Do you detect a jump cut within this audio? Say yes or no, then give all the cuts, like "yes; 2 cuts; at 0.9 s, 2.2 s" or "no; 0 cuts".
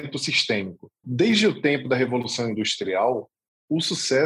yes; 1 cut; at 1.0 s